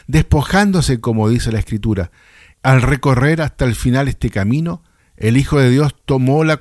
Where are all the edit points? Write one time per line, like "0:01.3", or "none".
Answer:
0:02.5